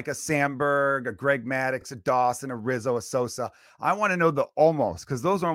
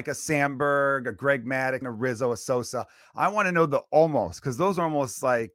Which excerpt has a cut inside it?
second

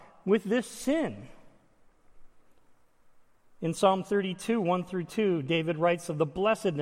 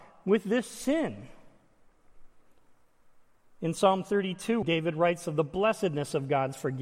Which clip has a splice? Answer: second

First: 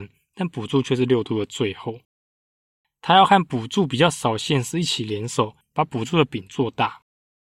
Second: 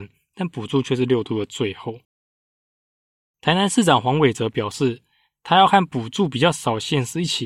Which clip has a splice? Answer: first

